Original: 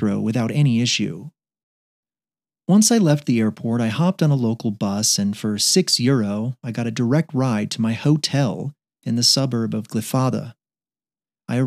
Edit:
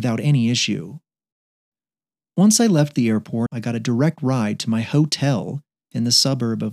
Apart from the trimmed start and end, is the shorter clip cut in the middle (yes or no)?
yes